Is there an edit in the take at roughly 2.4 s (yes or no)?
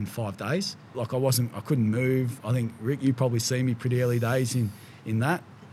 no